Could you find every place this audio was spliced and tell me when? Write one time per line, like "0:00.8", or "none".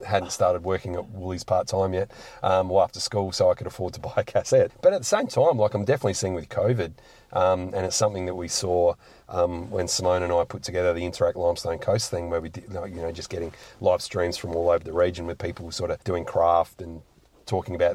0:04.7
0:16.0